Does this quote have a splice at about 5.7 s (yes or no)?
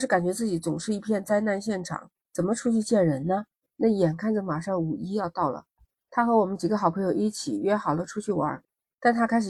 no